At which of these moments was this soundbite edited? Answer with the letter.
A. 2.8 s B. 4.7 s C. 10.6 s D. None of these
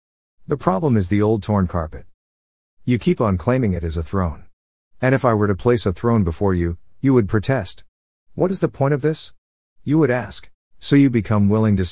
C